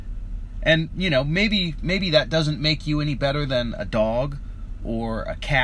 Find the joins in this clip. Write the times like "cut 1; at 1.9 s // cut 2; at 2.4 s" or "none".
none